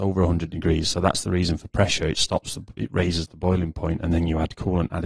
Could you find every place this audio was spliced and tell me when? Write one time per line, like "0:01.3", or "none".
none